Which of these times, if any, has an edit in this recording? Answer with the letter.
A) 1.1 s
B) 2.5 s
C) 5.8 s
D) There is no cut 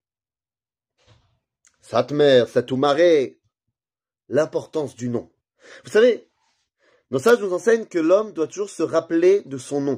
D